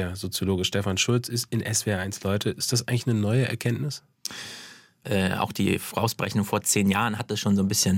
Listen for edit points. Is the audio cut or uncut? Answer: cut